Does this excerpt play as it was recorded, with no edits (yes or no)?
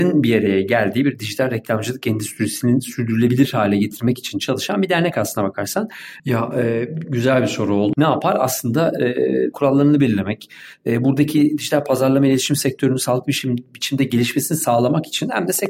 no